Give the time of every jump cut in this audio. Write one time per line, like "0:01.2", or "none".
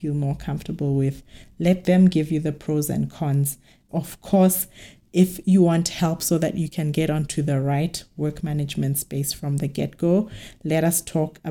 none